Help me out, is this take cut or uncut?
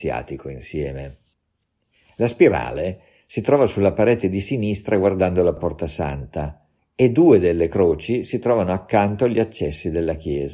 uncut